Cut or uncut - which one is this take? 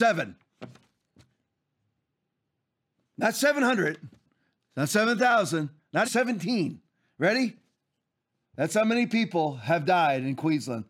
cut